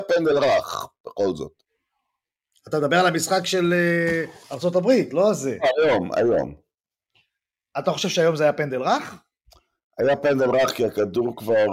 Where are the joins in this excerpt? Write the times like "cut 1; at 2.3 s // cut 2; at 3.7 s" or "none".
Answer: none